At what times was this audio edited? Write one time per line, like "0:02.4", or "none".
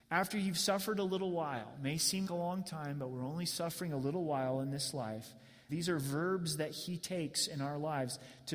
0:02.3
0:05.7